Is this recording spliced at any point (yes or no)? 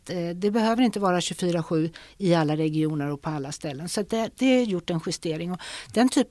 no